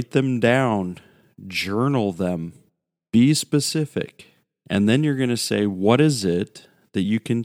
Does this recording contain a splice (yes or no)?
no